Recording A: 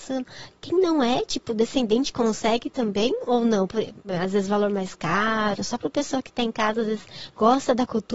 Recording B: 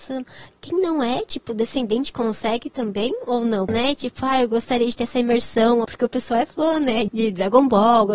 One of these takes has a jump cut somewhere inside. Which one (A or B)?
B